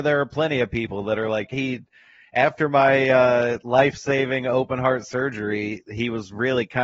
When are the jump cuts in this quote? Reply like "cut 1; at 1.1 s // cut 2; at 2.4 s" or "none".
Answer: cut 1; at 1.5 s